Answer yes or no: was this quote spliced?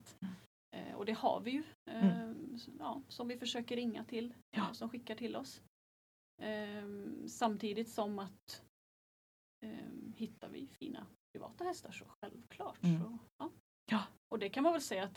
no